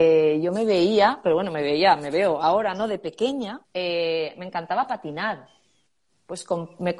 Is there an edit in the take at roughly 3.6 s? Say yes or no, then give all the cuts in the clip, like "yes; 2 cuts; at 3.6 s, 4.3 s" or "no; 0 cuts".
yes; 1 cut; at 3.6 s